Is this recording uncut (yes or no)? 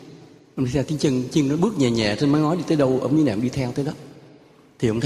yes